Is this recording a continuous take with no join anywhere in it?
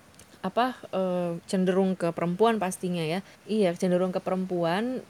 no; 2 cuts; at 1.4 s, 3.3 s

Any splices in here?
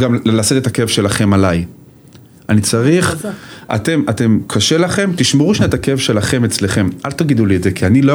no; 0 cuts

